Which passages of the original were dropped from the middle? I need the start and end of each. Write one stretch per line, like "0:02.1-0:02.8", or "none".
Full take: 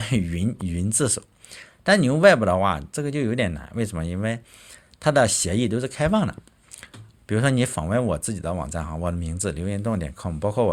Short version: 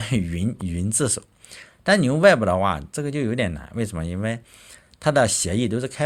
none